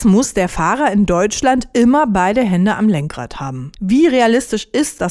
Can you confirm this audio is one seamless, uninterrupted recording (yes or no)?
yes